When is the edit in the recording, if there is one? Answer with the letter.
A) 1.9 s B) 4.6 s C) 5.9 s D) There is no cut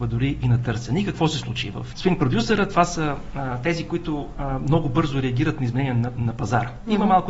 A